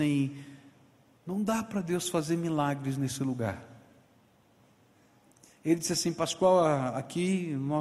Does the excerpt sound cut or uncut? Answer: uncut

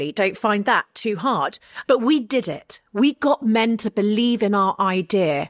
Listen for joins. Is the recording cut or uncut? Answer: cut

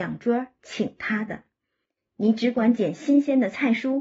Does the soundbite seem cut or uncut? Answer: uncut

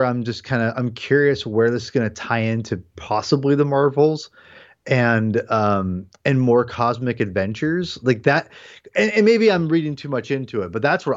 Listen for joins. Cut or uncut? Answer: uncut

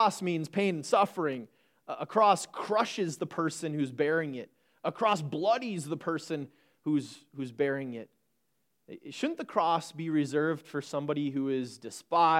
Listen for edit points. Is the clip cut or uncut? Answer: uncut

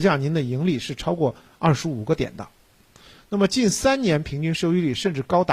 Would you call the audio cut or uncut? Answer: uncut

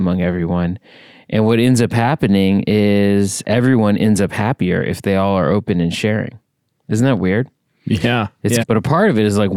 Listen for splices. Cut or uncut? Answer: cut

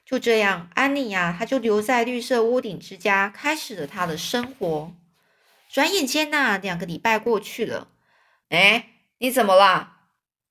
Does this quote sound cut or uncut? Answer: cut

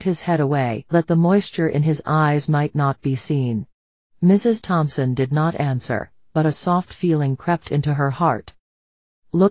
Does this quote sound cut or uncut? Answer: cut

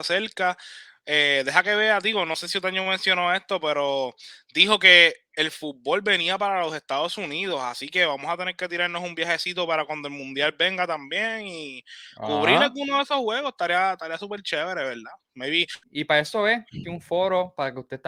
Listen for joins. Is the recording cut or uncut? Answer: cut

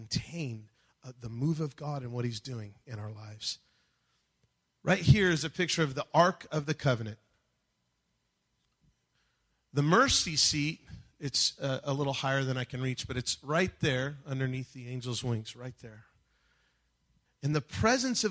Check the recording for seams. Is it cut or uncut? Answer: cut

